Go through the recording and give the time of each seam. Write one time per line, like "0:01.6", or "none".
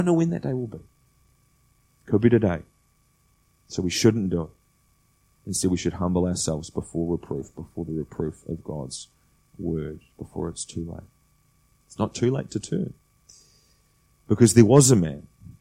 0:11.7